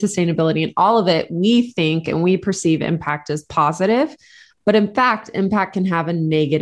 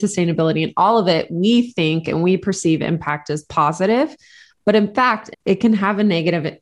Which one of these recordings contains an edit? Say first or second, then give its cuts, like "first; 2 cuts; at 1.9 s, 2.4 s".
second; 1 cut; at 5.3 s